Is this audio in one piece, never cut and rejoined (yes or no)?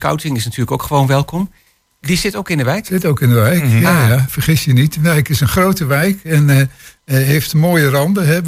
no